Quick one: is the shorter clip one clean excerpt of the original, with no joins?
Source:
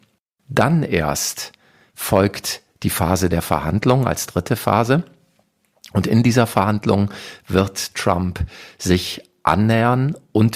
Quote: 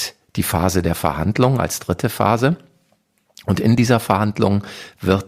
yes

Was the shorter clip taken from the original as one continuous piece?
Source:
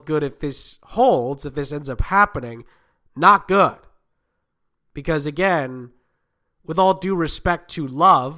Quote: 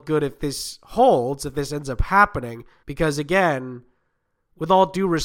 no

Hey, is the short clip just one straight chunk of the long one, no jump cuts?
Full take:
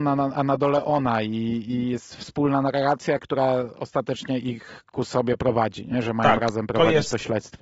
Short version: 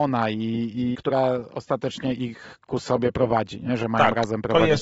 no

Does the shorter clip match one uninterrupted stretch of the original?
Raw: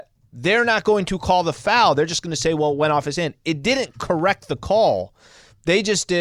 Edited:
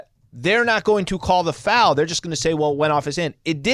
yes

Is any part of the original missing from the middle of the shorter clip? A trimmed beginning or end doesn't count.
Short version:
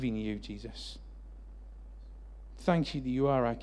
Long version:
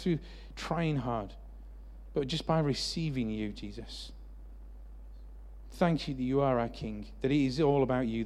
no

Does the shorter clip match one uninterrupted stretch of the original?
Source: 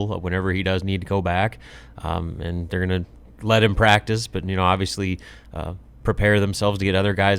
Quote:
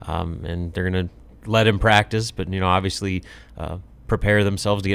yes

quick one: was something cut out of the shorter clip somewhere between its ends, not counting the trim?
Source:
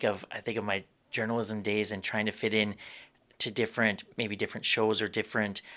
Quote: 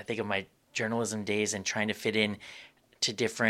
no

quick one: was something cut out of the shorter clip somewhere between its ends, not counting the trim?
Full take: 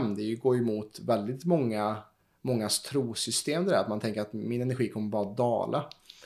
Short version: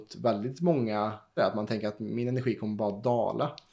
yes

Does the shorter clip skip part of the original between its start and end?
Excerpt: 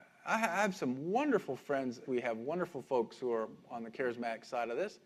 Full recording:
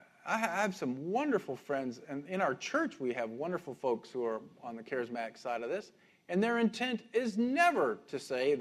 yes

